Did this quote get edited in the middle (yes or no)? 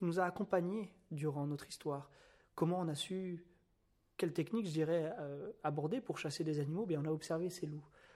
no